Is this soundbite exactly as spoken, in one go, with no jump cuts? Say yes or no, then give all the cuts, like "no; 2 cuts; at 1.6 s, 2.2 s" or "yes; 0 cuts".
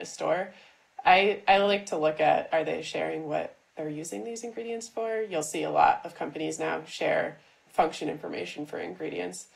no; 1 cut; at 7.7 s